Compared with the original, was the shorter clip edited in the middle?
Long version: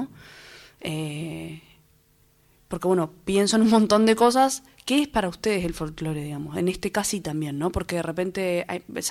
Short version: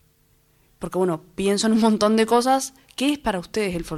no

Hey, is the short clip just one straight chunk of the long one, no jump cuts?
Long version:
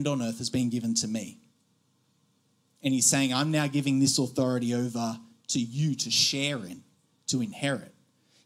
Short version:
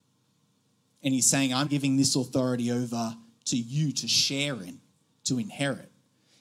no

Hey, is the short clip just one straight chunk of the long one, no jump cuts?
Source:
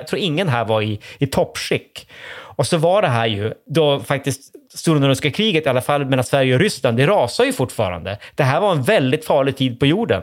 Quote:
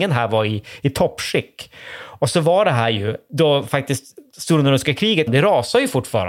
no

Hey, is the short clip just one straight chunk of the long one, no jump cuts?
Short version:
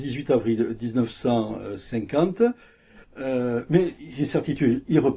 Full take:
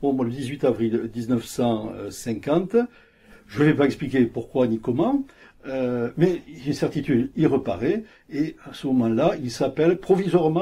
no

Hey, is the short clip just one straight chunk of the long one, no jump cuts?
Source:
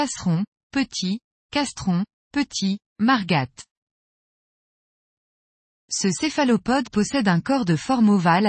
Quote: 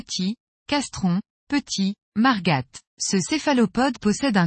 no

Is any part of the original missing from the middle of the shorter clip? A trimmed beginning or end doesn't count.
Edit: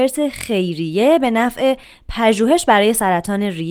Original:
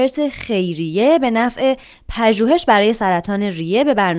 no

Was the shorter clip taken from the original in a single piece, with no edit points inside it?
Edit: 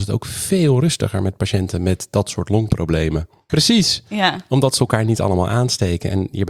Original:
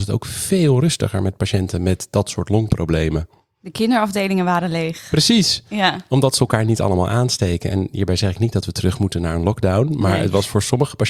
no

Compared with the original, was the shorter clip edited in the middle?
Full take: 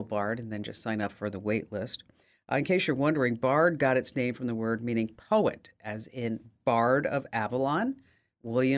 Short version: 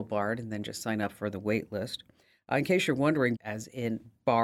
yes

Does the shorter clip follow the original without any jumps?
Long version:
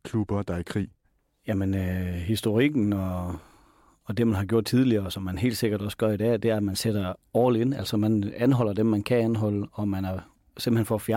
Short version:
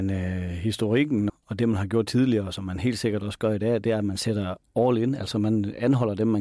no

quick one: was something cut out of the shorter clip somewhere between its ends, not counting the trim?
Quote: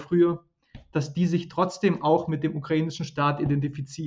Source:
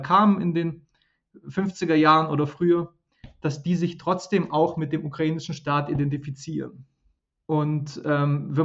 no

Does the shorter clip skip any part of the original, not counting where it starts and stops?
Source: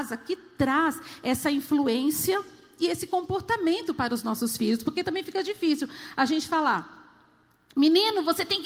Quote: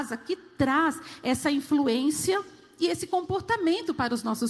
no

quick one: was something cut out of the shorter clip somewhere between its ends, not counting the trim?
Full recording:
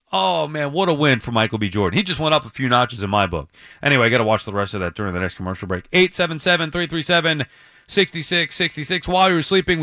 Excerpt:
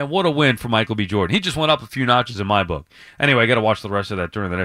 no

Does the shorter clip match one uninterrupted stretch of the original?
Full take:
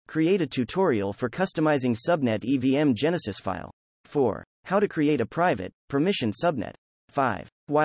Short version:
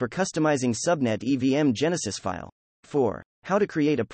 yes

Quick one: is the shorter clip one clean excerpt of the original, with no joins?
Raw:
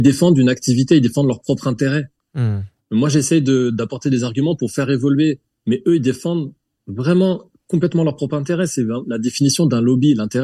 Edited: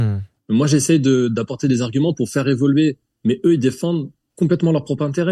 no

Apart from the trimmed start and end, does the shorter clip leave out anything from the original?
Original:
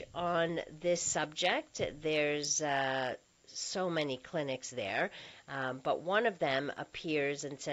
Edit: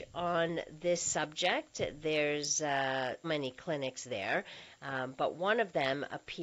yes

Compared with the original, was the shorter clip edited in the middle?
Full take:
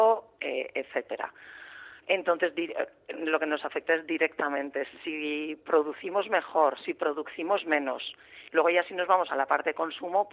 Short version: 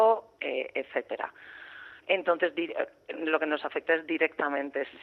no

